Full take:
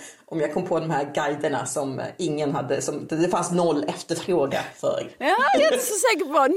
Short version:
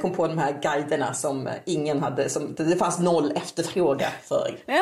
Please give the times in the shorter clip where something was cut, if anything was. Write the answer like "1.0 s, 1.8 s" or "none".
none